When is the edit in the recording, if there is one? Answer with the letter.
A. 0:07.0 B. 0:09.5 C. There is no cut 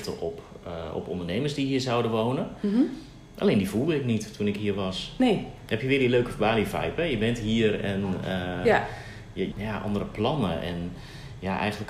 B